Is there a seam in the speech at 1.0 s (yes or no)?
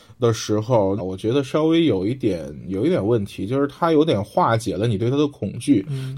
yes